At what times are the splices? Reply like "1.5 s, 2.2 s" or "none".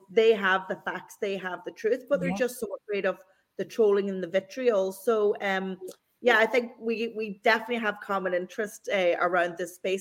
none